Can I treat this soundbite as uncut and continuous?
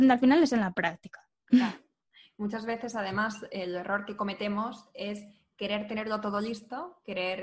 yes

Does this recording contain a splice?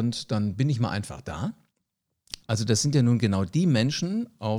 yes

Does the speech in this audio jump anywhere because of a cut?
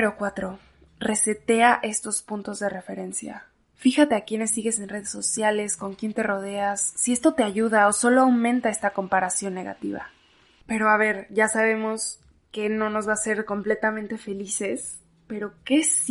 no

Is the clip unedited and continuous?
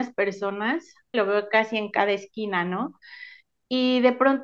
no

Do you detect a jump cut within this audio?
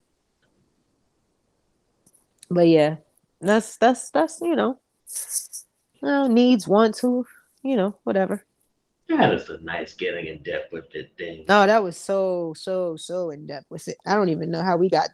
no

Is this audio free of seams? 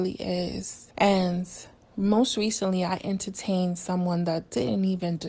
no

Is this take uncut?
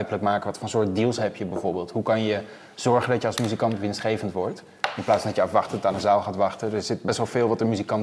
yes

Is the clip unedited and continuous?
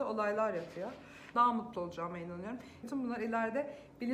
no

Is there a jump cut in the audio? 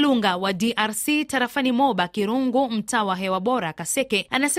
no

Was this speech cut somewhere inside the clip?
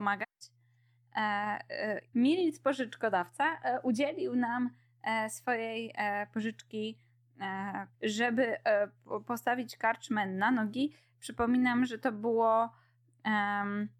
yes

